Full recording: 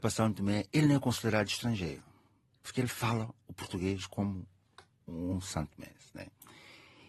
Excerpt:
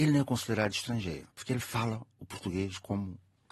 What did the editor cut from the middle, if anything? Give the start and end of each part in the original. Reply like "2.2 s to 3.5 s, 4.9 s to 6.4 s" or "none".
2.0 s to 2.6 s